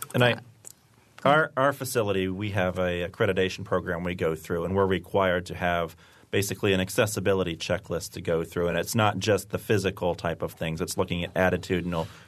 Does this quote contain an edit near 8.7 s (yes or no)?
no